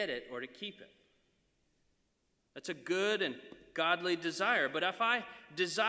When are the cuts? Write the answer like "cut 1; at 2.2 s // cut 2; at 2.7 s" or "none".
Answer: cut 1; at 2.4 s